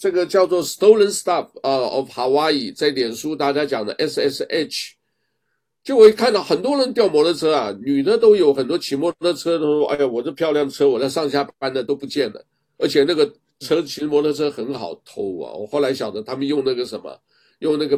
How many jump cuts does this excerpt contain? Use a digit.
0